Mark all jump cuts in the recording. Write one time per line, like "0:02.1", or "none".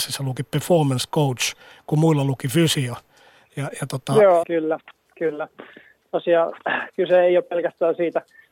0:04.4